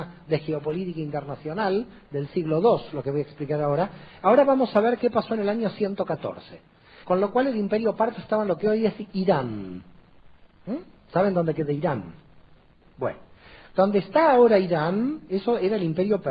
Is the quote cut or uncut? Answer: cut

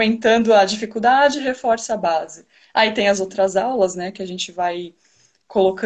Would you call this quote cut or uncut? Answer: uncut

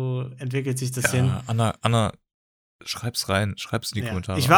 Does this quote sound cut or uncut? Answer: uncut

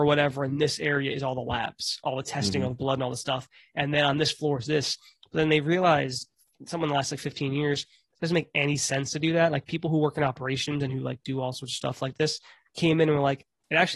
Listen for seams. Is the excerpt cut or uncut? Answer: uncut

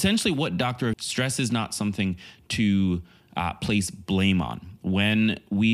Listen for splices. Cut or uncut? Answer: cut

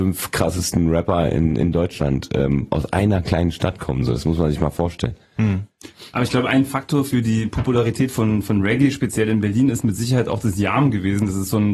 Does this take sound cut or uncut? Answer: uncut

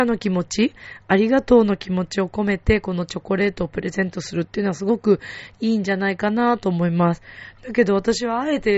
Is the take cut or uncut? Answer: uncut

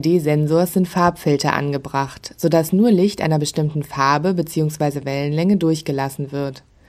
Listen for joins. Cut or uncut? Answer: uncut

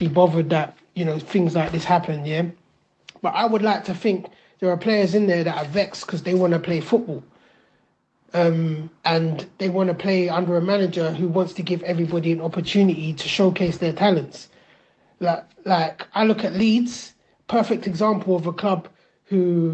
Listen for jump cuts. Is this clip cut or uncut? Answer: uncut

